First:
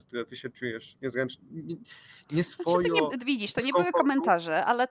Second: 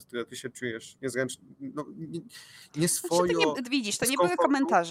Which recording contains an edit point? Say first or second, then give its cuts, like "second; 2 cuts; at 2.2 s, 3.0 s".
first; 1 cut; at 1.5 s